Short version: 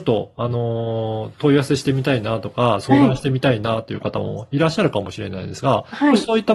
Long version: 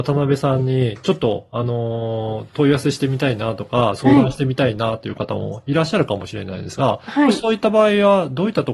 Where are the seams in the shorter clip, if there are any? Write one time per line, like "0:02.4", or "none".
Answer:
none